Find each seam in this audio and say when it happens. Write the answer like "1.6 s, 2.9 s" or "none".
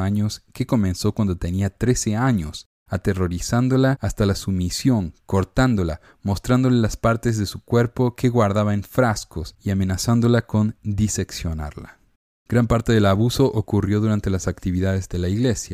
none